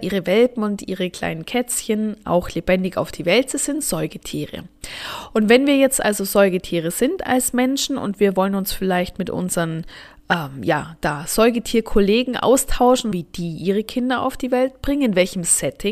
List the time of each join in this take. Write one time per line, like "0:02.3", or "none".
0:13.1